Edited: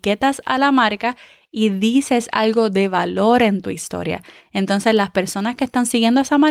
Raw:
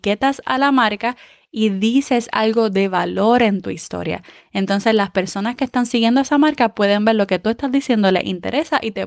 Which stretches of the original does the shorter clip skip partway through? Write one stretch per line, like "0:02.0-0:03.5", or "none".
none